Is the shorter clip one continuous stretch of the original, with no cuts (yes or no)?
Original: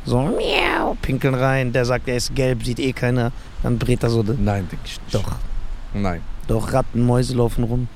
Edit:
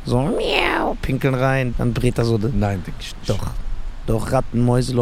no